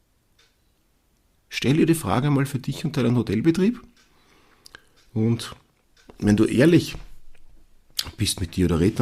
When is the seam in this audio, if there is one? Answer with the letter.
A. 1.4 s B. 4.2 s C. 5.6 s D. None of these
A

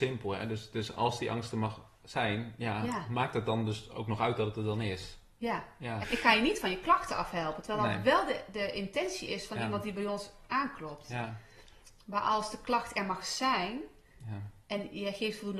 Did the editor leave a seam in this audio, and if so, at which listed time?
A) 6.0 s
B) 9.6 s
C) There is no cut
A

